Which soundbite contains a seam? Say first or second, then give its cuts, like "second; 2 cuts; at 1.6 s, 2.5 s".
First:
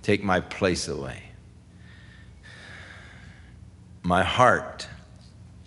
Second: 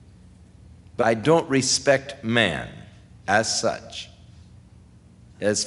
second; 1 cut; at 1.0 s